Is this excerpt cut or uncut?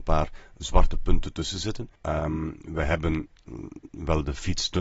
cut